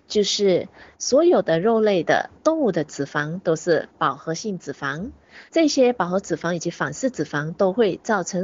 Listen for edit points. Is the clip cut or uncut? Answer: cut